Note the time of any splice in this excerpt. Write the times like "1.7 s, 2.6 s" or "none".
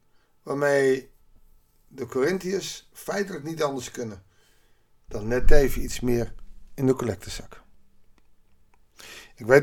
none